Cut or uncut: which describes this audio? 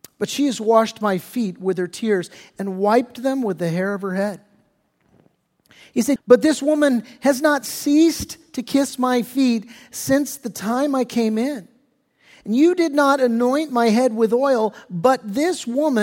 cut